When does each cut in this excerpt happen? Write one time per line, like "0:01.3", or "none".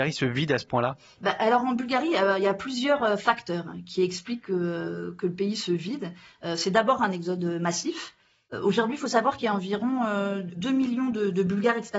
none

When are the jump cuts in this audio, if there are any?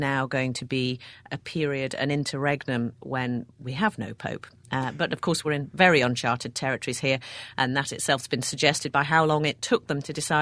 none

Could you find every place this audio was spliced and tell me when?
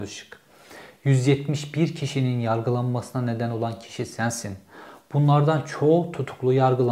none

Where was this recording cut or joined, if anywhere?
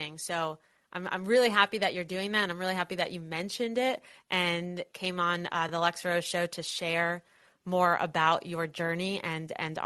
none

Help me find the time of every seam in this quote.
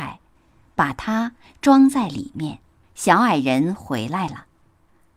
0:02.8

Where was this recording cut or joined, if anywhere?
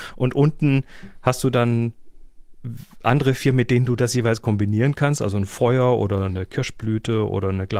0:06.3

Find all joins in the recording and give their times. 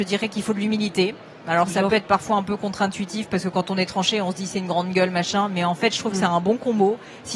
none

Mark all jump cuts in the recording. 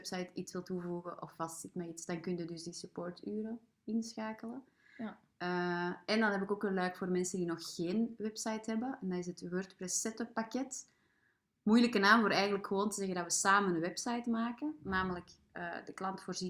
none

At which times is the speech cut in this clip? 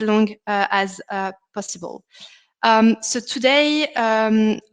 none

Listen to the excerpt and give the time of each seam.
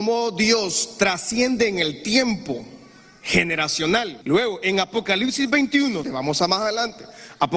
0:04.2
0:06.0

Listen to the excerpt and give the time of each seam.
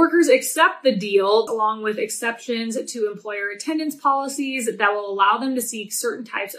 0:01.5

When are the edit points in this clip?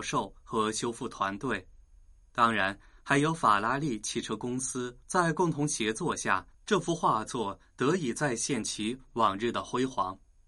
0:05.0
0:06.5

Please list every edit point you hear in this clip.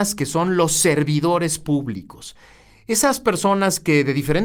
none

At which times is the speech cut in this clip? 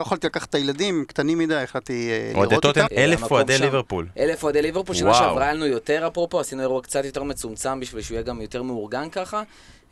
0:02.9

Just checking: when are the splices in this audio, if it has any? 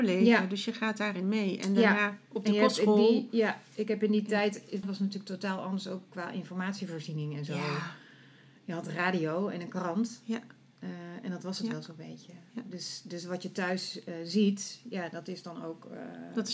0:04.8

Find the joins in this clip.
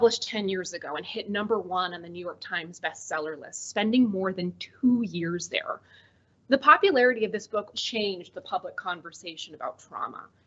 0:07.7

